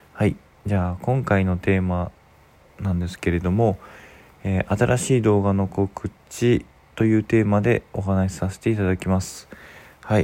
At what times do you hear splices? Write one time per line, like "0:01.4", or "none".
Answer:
none